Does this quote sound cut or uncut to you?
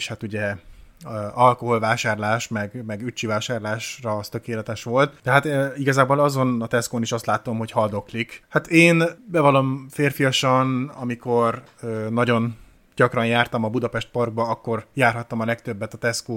cut